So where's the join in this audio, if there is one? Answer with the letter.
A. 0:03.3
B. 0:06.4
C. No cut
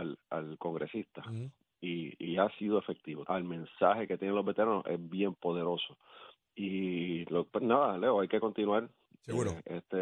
A